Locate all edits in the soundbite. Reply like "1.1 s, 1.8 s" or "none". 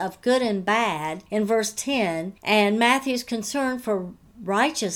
1.3 s, 2.4 s